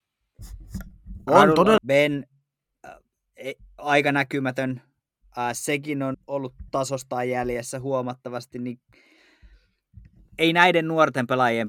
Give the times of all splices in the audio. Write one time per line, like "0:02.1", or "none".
0:01.8
0:06.1